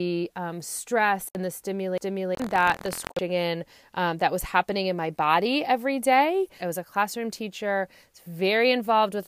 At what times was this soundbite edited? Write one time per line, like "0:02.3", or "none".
0:06.6